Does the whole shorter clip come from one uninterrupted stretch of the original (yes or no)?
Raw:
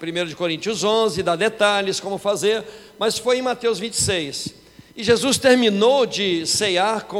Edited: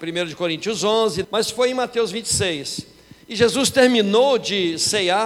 no